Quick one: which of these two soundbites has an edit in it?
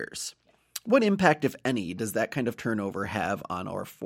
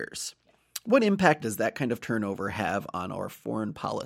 second; 1 cut; at 1.4 s

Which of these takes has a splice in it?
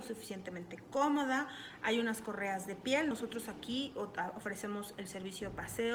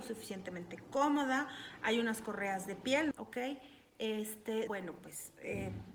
second; 2 cuts; at 3.1 s, 4.7 s

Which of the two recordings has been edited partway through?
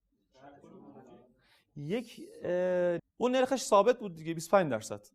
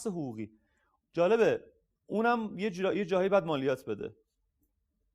first; 1 cut; at 3.0 s

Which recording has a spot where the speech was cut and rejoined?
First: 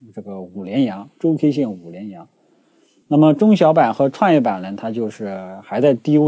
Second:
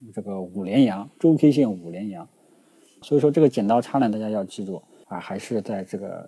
second; 2 cuts; at 3.0 s, 5.0 s

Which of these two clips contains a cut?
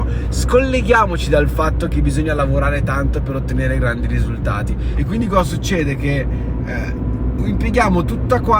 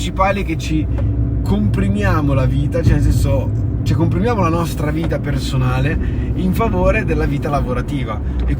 first; 1 cut; at 4.9 s

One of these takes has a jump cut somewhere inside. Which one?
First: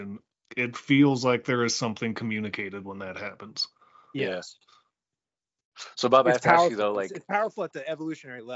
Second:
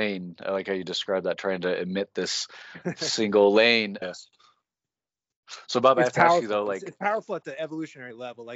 second; 1 cut; at 4.0 s

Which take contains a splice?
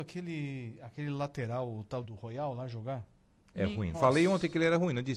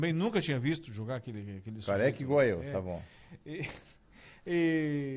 first; 2 cuts; at 2.0 s, 3.9 s

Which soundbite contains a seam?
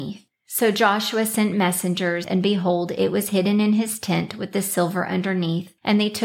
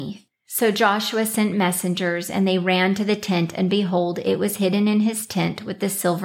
first; 1 cut; at 2.2 s

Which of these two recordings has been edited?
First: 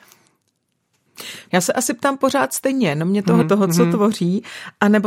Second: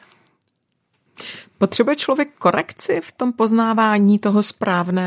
first; 2 cuts; at 1.5 s, 3.4 s

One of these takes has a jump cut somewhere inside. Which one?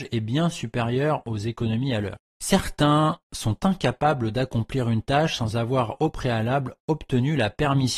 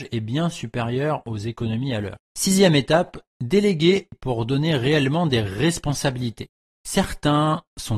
first; 1 cut; at 2.3 s

